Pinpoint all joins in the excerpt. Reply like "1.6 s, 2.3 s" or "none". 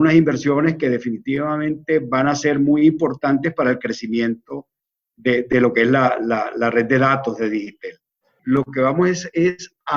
8.4 s